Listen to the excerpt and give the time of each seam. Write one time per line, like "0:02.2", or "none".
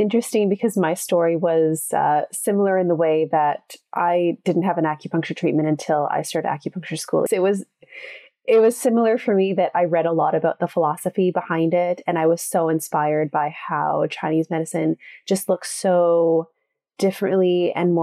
0:07.3